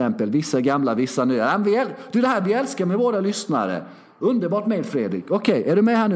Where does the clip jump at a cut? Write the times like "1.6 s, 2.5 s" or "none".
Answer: none